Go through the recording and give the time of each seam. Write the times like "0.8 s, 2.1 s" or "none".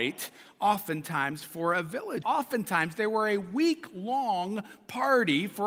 2.2 s